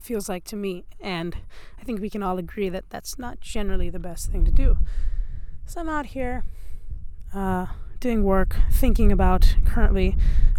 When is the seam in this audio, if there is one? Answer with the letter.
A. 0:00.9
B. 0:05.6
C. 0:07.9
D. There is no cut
A